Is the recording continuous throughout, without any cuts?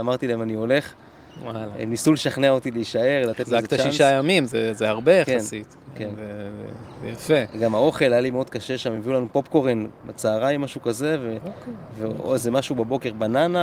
yes; 0 cuts

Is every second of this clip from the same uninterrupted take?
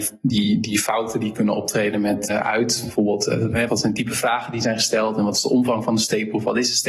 no; 2 cuts; at 2.3 s, 3.7 s

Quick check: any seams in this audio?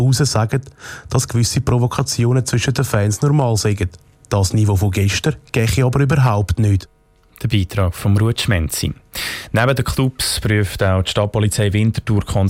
no; 0 cuts

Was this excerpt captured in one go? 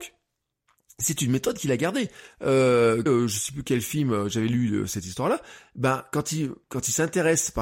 no; 1 cut; at 3.1 s

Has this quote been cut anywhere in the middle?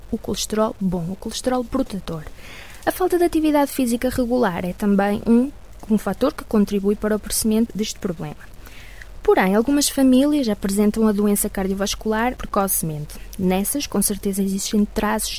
yes; 2 cuts; at 7.7 s, 12.4 s

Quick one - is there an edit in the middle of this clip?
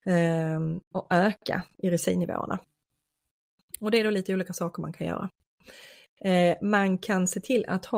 no; 0 cuts

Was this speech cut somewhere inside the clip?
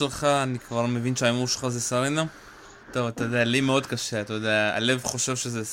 yes; 1 cut; at 2.8 s

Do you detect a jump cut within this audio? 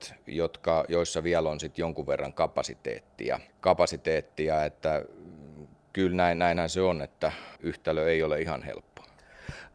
yes; 2 cuts; at 3.5 s, 7.6 s

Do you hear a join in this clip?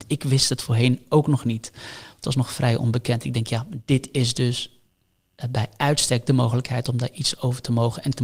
no; 0 cuts

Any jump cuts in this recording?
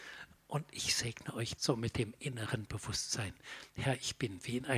yes; 1 cut; at 1.6 s

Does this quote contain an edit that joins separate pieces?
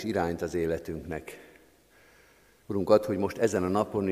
yes; 1 cut; at 2.6 s

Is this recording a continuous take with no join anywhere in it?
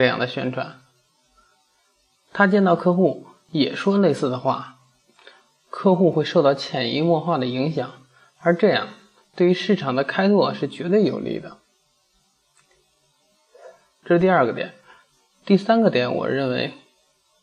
yes; 0 cuts

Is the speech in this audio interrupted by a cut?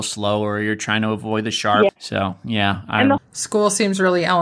yes; 2 cuts; at 1.9 s, 3.2 s

